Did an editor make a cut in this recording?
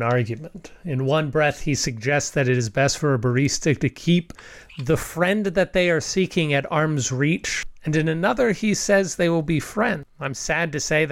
no; 0 cuts

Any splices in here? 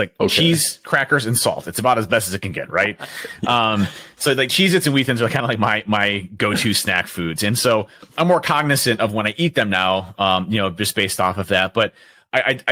no; 0 cuts

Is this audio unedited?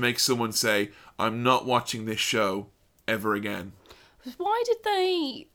yes; 0 cuts

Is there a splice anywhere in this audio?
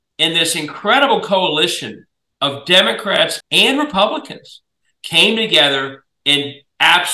yes; 1 cut; at 3.4 s

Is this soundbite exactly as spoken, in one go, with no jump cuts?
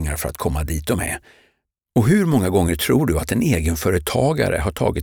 no; 1 cut; at 1.8 s

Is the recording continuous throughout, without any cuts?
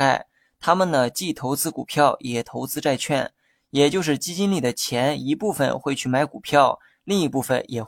yes; 0 cuts

